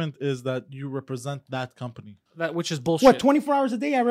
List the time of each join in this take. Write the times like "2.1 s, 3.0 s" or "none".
2.3 s